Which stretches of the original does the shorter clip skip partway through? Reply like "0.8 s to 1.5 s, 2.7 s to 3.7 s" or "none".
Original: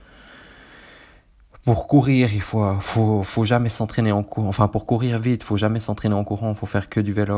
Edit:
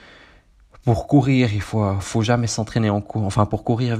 2.8 s to 3.2 s